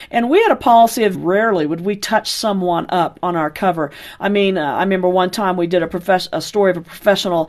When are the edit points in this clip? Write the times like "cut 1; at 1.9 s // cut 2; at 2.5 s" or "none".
cut 1; at 1.1 s